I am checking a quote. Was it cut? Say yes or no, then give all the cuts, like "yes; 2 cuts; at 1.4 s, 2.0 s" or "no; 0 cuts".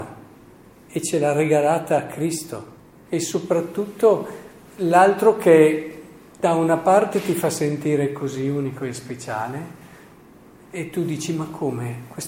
yes; 1 cut; at 3.0 s